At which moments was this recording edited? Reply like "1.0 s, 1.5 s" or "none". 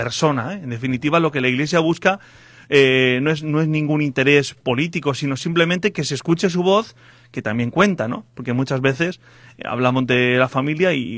none